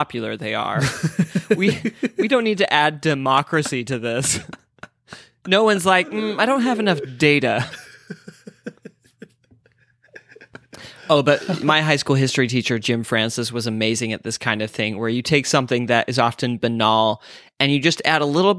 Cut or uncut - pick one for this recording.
uncut